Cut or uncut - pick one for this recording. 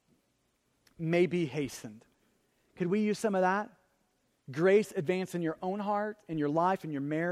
cut